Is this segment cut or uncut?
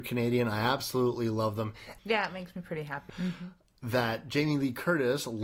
cut